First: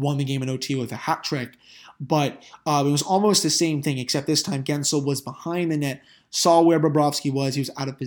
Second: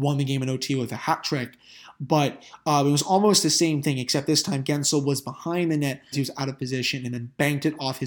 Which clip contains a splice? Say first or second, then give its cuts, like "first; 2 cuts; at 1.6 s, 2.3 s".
second; 1 cut; at 6.1 s